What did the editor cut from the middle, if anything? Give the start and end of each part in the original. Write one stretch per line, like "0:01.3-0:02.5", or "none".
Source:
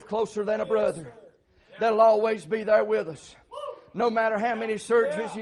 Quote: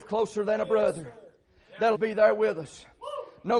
0:01.9-0:02.4